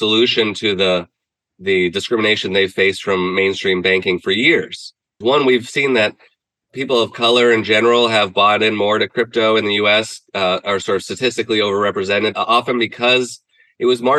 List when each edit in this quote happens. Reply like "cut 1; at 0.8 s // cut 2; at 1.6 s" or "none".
cut 1; at 5.2 s